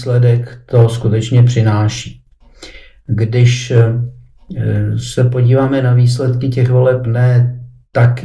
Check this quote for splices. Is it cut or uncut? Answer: uncut